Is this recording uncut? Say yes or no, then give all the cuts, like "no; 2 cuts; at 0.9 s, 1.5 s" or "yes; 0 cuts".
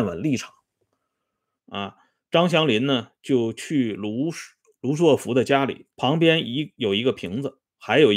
no; 2 cuts; at 1.6 s, 5.9 s